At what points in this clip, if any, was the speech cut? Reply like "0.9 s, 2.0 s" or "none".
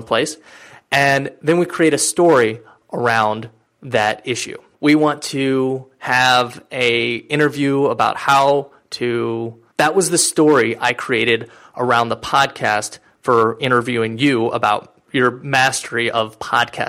4.7 s, 9.7 s, 15.1 s